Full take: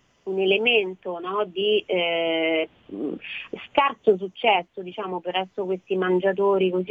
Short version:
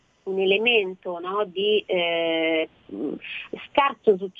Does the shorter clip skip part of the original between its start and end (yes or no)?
no